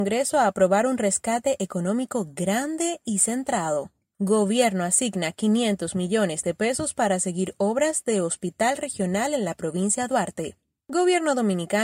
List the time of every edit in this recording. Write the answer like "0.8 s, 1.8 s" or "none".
none